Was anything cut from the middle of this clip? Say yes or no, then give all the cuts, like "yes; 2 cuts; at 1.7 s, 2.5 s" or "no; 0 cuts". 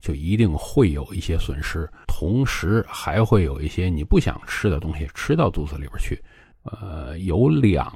yes; 2 cuts; at 2.0 s, 6.5 s